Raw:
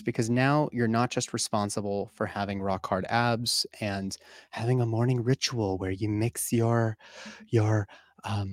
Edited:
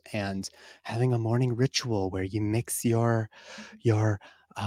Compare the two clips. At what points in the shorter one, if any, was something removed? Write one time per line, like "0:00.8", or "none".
none

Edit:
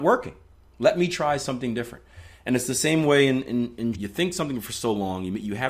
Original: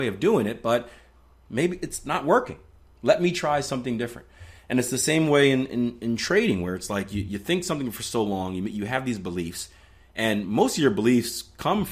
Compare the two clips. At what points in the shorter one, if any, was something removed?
0:03.9

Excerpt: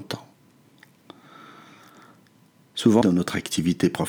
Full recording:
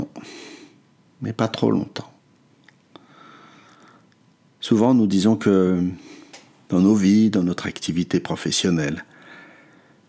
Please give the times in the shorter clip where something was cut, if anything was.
0:03.0

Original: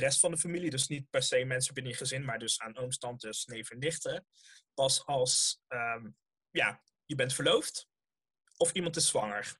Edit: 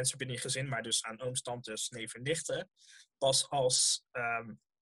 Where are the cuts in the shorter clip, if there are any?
none

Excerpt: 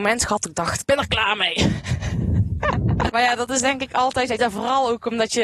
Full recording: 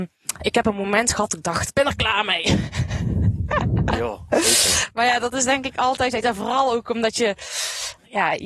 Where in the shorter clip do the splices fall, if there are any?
0:03.1

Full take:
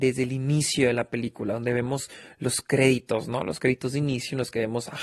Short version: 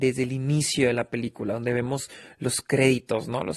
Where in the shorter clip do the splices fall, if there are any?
none

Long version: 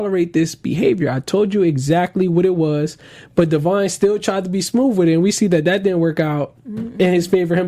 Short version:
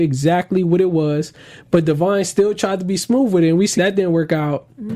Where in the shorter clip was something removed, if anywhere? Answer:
0:03.8

